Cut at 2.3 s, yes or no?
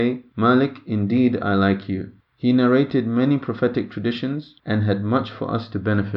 yes